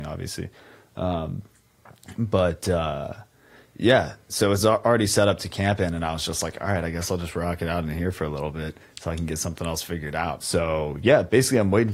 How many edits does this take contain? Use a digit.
1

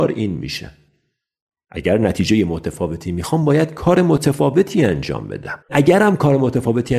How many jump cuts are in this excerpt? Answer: 1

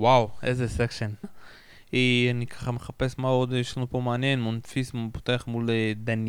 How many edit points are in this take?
1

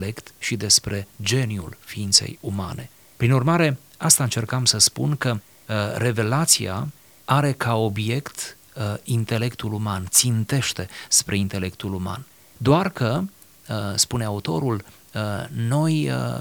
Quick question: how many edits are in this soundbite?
0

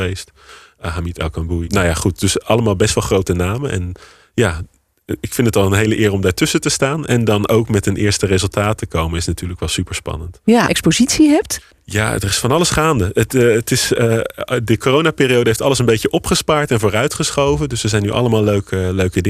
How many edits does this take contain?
2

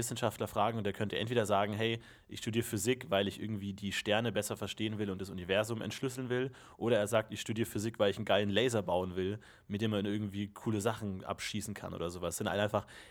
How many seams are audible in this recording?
0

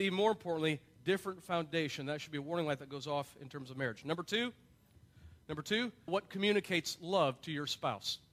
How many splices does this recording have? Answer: 1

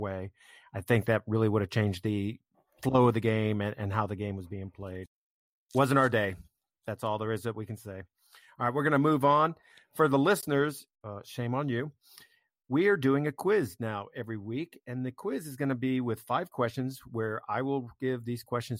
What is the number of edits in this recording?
1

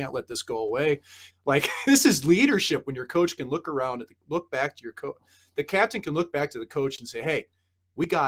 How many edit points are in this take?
1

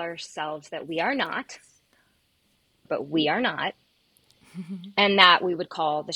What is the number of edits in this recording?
1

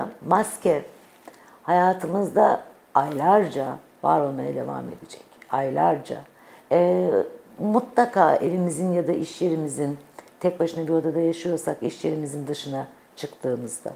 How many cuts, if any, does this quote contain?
1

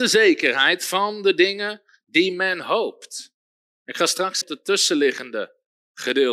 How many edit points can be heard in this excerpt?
1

